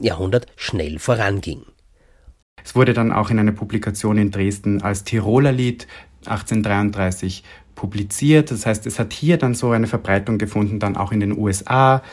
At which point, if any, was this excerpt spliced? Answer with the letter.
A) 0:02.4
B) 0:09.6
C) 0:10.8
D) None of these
A